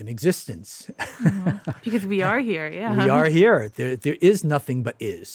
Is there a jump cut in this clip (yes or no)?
no